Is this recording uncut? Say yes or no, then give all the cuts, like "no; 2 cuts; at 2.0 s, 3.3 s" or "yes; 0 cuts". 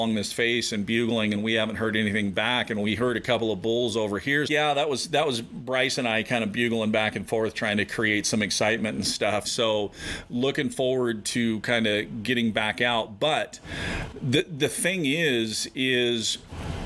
no; 2 cuts; at 4.5 s, 9.4 s